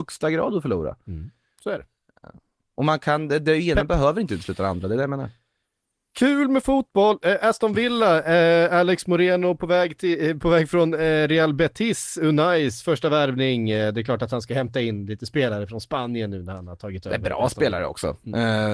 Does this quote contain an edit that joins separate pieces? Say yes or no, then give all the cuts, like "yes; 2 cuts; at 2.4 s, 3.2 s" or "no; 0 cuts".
no; 0 cuts